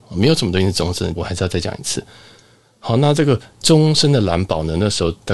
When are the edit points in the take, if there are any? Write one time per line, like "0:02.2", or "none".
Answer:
0:01.1